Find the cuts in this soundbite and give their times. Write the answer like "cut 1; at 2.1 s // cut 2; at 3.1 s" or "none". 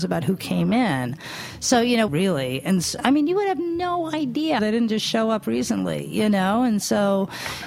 cut 1; at 2.1 s // cut 2; at 4.6 s